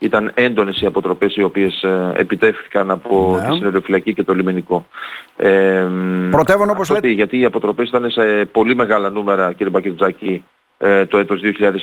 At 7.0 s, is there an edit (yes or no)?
yes